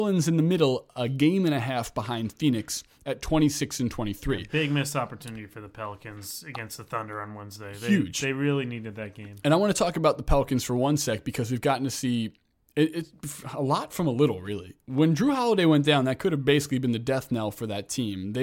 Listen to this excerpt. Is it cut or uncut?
uncut